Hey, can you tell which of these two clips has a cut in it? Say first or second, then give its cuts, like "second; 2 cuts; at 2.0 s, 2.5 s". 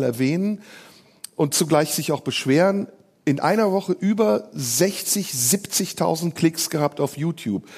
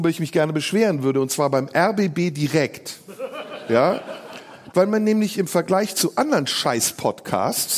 second; 1 cut; at 4.7 s